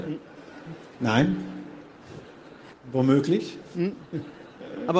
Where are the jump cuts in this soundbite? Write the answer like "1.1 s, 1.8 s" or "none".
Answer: 0.9 s, 2.7 s